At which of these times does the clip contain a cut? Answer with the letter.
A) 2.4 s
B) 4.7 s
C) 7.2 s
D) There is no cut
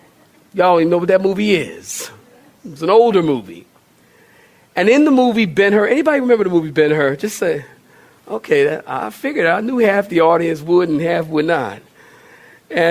D